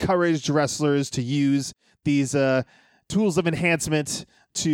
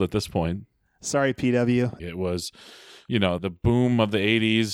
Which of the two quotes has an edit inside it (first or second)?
second